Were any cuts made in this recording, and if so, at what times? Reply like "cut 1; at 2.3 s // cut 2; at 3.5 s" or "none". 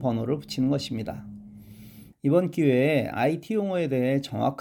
cut 1; at 2.1 s